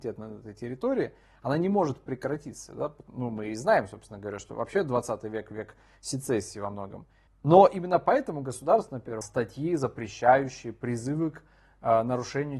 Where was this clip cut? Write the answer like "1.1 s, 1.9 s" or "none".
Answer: 7.3 s, 9.2 s